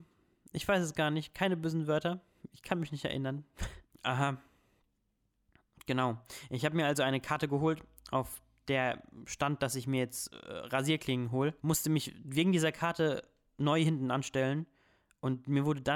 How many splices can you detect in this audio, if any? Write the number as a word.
two